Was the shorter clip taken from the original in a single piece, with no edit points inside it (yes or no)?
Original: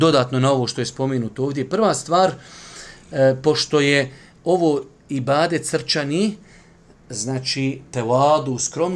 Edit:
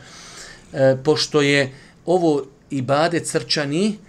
yes